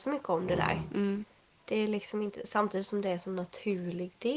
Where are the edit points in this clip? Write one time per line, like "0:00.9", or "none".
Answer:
none